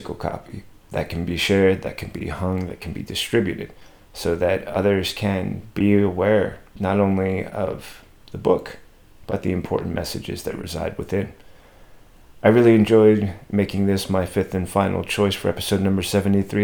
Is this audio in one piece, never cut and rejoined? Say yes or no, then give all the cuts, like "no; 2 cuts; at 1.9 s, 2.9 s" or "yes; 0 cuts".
yes; 0 cuts